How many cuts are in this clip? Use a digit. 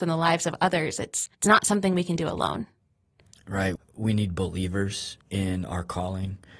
3